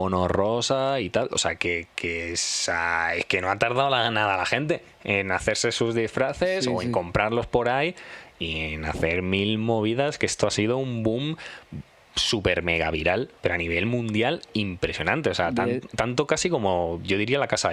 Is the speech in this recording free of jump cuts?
no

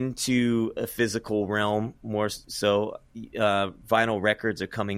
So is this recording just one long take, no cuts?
yes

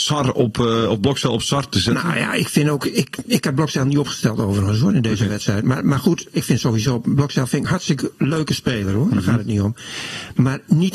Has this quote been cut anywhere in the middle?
yes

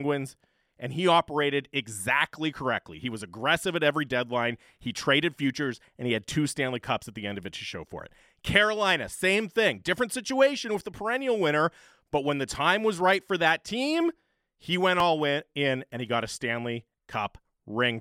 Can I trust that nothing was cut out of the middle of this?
yes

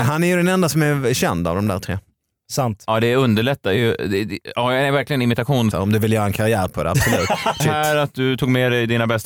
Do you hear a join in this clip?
yes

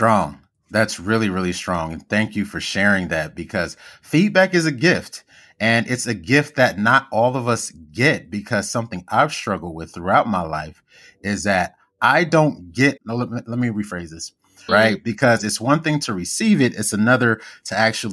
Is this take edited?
yes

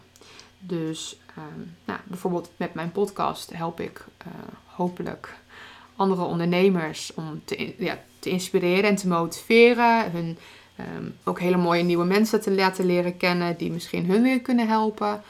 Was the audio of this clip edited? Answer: yes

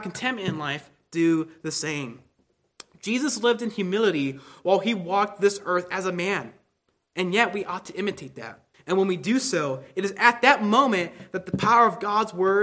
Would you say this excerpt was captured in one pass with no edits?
no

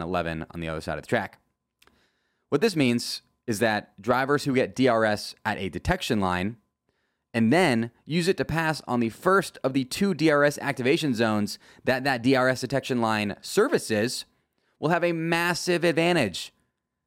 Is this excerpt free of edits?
yes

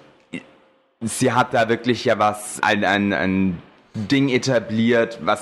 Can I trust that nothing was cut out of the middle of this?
no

